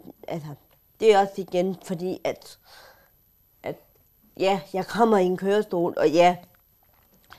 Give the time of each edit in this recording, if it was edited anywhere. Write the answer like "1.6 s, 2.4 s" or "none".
none